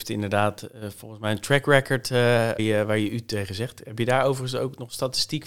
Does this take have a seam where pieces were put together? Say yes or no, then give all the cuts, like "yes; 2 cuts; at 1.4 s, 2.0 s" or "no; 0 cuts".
yes; 1 cut; at 2.6 s